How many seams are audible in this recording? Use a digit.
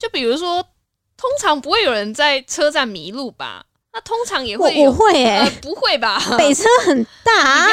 0